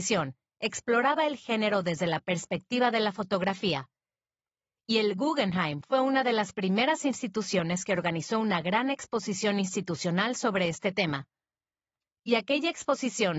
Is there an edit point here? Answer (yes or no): no